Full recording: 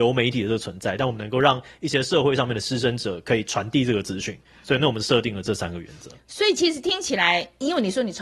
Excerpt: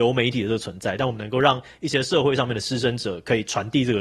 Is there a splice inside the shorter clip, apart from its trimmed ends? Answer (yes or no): no